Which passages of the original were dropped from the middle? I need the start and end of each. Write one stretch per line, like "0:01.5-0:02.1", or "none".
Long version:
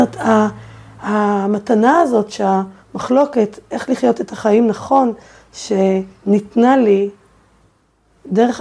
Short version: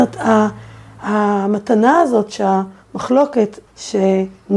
0:03.7-0:05.4